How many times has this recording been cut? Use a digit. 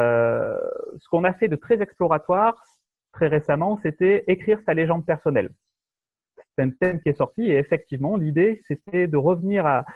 0